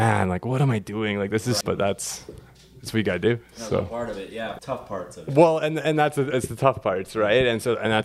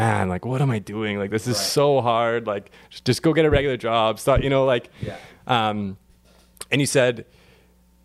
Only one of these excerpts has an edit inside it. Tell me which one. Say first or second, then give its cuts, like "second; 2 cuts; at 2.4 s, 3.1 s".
first; 2 cuts; at 1.6 s, 4.6 s